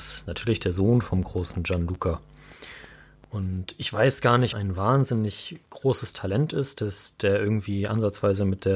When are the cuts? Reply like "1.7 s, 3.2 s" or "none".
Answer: 4.5 s